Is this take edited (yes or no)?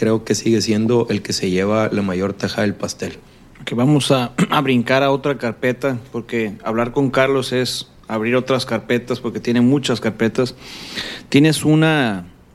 no